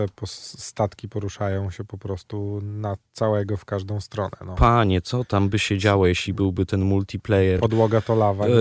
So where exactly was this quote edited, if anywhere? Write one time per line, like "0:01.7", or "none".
none